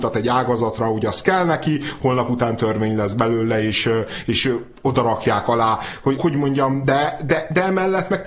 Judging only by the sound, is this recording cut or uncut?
cut